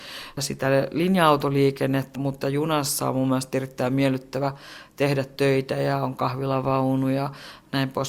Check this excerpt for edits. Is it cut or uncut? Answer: cut